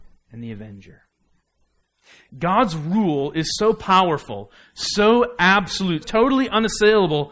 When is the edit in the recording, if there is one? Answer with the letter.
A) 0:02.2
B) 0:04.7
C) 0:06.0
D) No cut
C